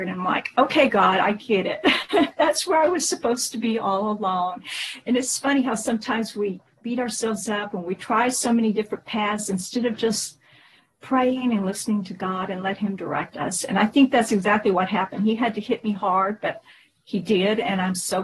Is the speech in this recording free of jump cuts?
yes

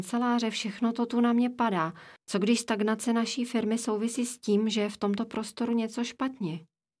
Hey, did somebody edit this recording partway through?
yes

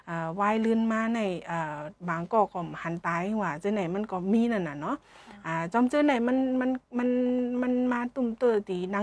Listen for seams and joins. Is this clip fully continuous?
no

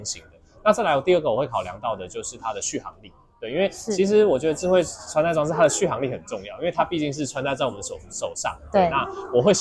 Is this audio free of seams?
yes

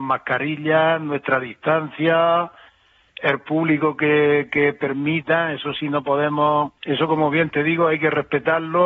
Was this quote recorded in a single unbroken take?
no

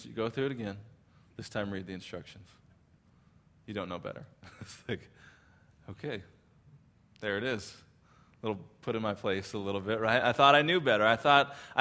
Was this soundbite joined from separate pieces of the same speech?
no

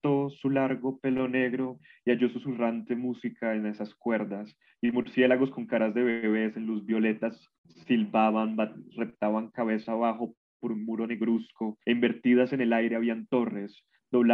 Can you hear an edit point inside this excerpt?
yes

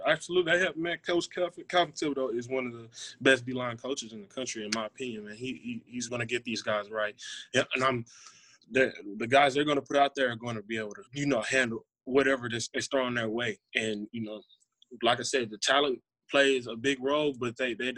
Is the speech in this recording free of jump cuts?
no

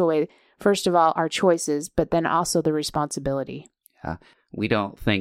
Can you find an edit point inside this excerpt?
no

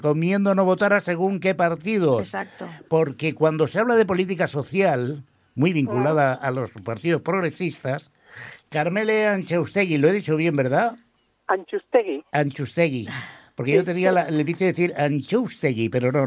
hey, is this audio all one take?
no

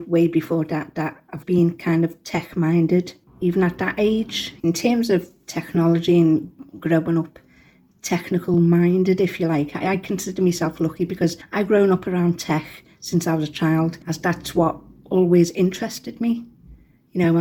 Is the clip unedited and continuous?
no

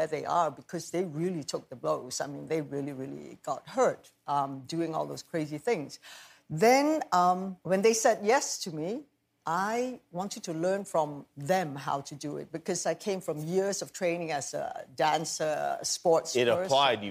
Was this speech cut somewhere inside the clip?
yes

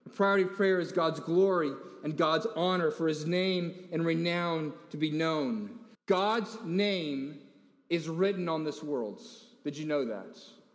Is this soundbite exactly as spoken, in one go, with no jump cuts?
no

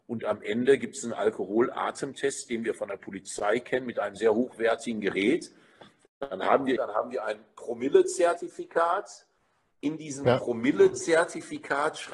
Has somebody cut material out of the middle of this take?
yes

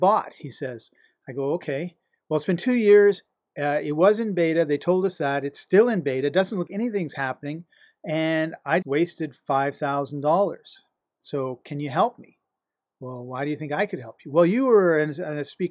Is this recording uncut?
no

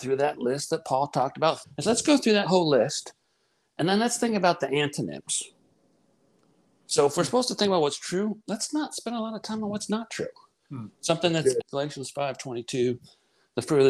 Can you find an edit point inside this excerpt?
yes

